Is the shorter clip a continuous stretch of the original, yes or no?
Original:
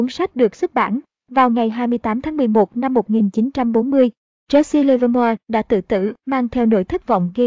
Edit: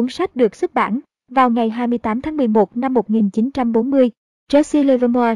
yes